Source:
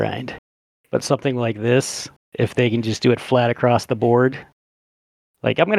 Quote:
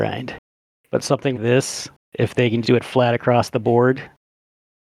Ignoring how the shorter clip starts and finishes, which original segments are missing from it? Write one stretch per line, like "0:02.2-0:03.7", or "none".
0:01.3-0:01.5
0:02.8-0:03.0